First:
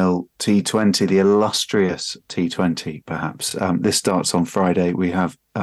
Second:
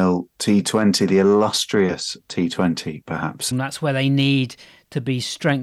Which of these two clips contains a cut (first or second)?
second